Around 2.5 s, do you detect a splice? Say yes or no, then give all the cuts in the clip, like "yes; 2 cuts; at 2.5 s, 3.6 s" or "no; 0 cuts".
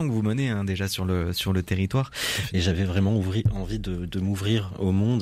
yes; 1 cut; at 2.5 s